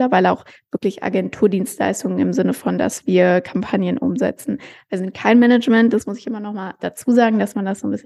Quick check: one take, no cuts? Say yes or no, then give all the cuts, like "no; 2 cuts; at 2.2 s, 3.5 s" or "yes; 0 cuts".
yes; 0 cuts